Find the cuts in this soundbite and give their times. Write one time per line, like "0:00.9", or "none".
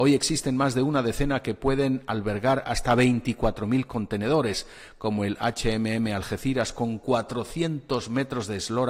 none